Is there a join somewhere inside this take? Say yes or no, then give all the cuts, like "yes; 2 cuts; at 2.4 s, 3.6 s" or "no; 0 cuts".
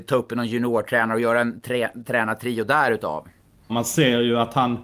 yes; 1 cut; at 3.7 s